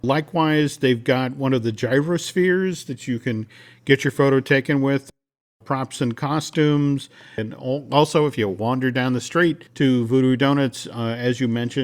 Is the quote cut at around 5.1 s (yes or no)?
no